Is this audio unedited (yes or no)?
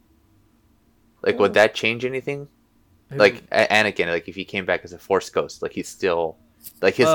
yes